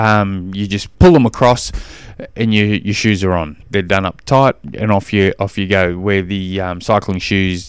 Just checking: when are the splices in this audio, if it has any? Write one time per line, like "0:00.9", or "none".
0:00.9
0:03.6